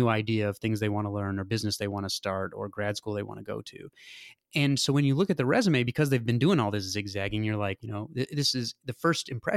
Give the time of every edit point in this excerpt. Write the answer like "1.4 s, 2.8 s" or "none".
7.8 s